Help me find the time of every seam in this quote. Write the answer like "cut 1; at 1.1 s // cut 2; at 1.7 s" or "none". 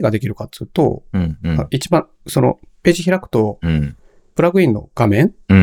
none